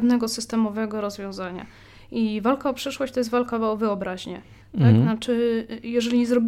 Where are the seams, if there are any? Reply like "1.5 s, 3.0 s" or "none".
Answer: 4.6 s